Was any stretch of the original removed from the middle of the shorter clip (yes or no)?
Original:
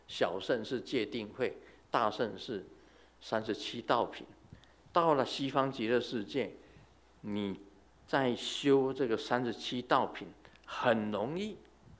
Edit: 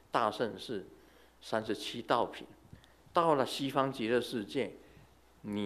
no